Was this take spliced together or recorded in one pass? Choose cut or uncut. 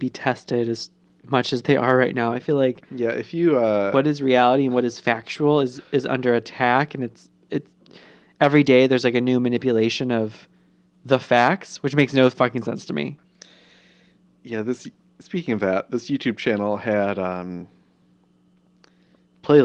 uncut